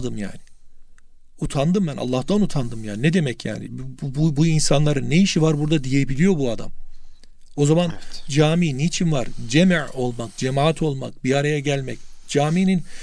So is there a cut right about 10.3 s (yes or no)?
no